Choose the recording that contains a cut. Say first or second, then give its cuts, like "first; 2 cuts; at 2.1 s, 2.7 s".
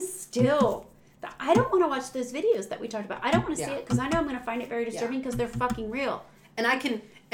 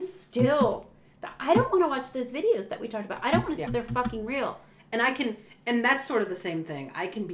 second; 1 cut; at 3.7 s